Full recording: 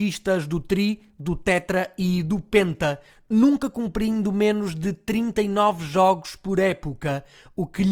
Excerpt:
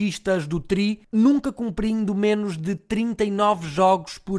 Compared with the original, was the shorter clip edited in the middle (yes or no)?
yes